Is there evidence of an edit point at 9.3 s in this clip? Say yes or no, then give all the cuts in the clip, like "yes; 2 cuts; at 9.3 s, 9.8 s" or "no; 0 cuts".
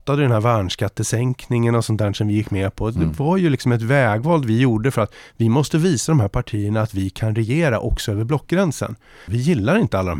yes; 1 cut; at 9.3 s